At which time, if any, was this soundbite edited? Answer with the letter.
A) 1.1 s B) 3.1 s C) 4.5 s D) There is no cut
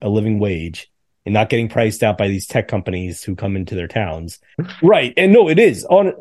C